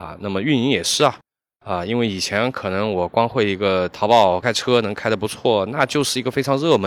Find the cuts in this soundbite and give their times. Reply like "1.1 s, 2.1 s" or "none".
4.4 s